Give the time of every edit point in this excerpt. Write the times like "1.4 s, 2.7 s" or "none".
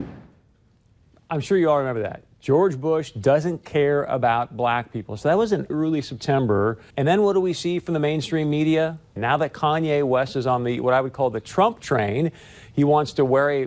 5.7 s, 6.9 s, 9.2 s